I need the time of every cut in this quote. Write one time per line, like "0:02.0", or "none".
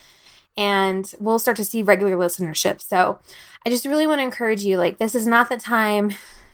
none